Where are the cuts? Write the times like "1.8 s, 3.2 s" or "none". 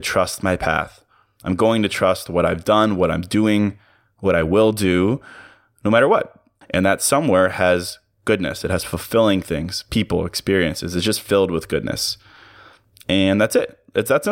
6.6 s

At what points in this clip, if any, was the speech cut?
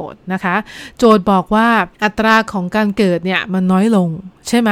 1.9 s

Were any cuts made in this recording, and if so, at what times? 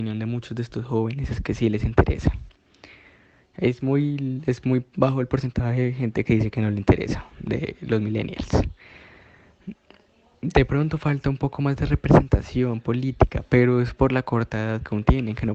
none

